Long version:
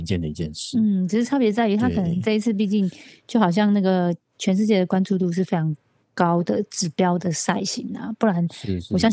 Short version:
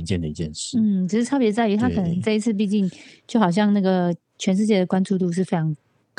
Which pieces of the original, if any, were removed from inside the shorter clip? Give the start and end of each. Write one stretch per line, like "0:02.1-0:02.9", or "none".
none